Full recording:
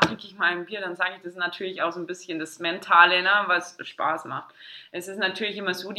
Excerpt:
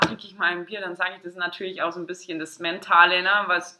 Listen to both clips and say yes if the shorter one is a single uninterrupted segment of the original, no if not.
yes